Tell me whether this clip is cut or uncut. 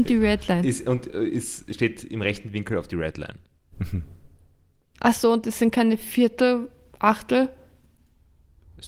uncut